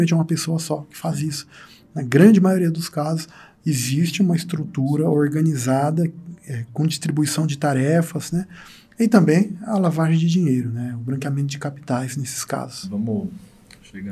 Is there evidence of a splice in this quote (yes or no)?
no